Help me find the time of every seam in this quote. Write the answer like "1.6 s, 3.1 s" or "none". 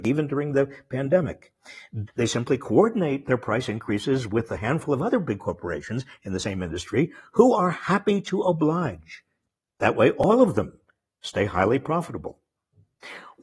2.1 s

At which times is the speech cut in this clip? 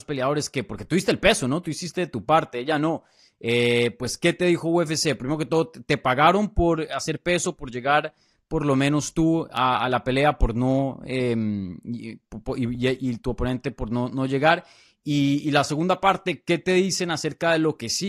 none

